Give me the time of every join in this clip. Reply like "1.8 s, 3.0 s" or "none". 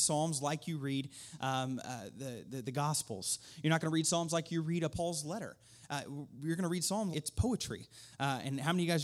4.9 s, 7.1 s